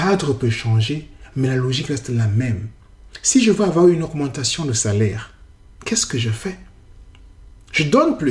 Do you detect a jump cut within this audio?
no; 0 cuts

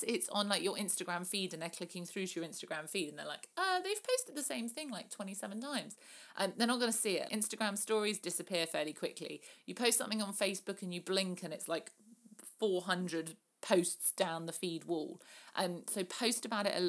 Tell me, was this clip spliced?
yes; 1 cut; at 7.3 s

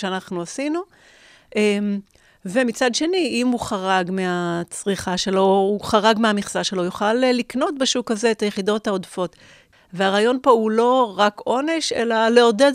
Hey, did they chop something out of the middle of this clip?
yes; 1 cut; at 9.7 s

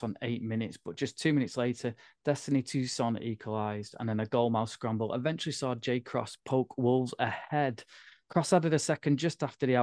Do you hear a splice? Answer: no; 0 cuts

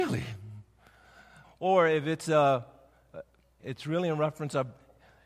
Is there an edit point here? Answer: yes; 2 cuts; at 1.4 s, 3.6 s

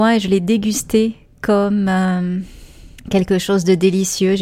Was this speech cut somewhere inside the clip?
yes; 1 cut; at 3.0 s

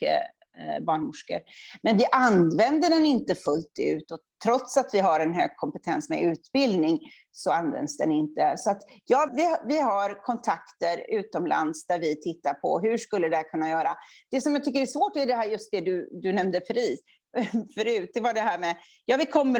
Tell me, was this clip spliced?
yes; 1 cut; at 9.3 s

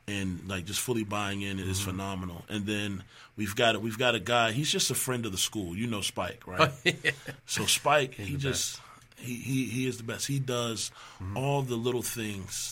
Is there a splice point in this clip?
no; 0 cuts

